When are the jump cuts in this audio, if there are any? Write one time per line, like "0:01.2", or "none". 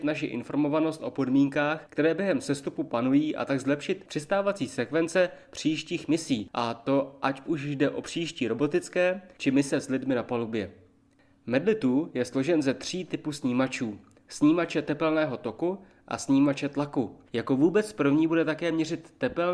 0:14.2
0:17.2